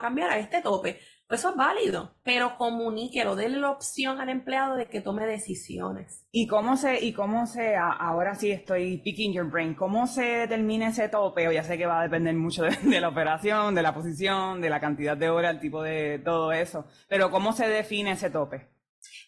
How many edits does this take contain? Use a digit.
0